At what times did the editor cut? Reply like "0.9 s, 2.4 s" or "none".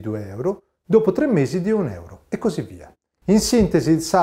3.1 s